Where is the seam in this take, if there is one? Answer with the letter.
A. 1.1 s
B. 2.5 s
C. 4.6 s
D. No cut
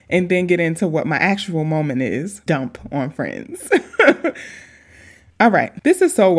B